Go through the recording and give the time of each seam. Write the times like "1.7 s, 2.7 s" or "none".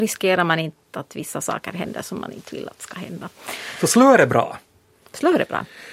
none